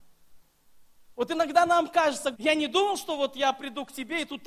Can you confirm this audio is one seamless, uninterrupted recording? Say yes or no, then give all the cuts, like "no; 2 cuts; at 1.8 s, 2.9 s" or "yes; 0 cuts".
no; 1 cut; at 2.3 s